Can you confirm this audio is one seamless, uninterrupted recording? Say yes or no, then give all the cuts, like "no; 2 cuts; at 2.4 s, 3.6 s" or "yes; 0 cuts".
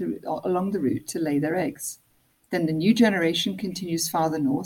yes; 0 cuts